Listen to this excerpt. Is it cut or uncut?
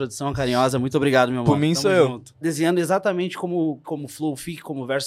cut